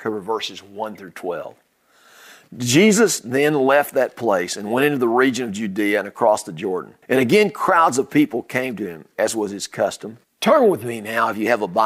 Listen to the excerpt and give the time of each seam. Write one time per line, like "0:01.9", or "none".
0:07.0
0:10.2